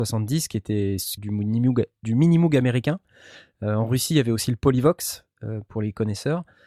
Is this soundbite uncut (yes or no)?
no